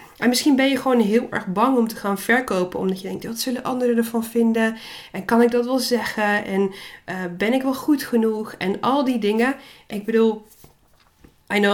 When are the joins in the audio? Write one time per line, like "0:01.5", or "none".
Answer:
none